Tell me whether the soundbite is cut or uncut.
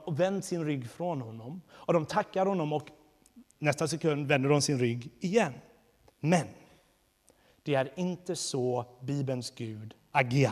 cut